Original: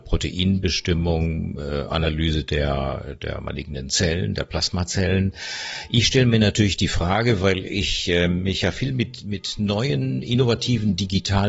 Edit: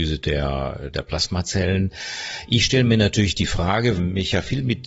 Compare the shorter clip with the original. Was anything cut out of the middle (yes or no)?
yes